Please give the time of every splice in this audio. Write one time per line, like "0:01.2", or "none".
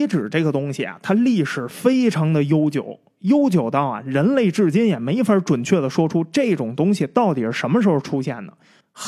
none